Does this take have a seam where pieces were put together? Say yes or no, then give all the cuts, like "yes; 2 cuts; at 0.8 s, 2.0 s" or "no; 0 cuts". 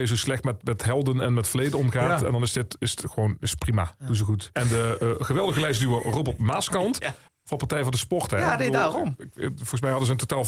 yes; 2 cuts; at 4.5 s, 7.3 s